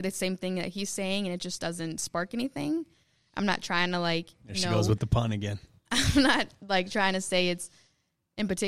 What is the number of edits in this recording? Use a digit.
0